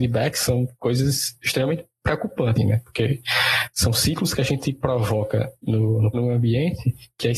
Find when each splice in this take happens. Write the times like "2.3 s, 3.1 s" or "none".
2.6 s, 6.1 s